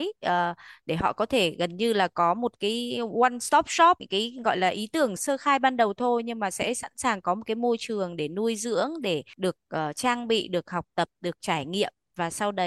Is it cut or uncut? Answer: cut